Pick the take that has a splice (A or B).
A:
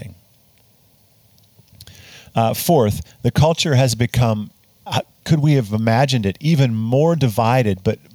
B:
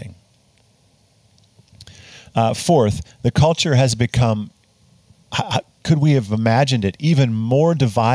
A